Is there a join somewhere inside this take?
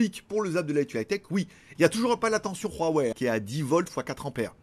yes; 2 cuts; at 1.8 s, 3.1 s

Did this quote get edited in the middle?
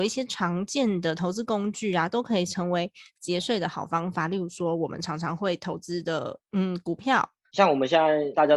yes; 1 cut; at 7.5 s

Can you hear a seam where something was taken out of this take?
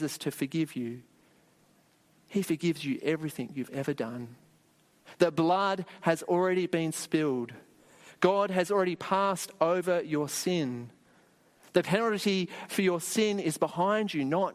no; 0 cuts

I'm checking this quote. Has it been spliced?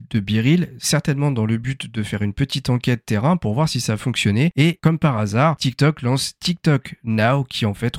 no; 0 cuts

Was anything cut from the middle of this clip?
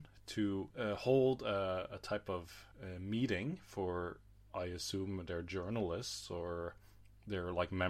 yes; 1 cut; at 2.7 s

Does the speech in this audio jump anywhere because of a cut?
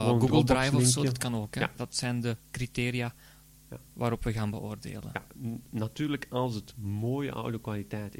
yes; 1 cut; at 1.8 s

